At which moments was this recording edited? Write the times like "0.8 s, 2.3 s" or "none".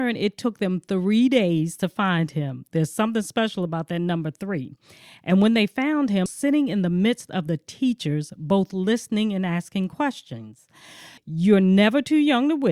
6.3 s, 11.2 s